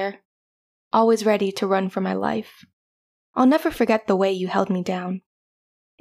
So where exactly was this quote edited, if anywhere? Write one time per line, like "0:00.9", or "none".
0:03.2

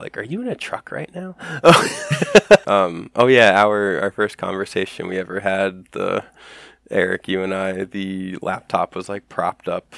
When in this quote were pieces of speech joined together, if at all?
0:02.6

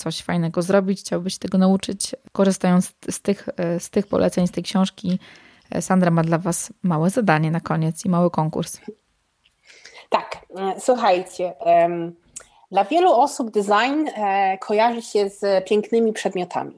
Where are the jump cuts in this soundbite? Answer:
none

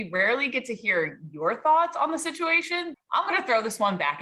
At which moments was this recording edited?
0:02.9

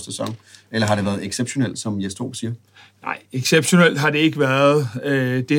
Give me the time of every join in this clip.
none

